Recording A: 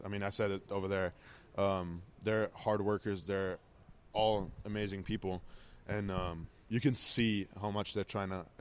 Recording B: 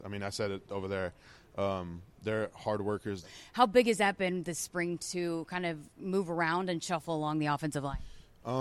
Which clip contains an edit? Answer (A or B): B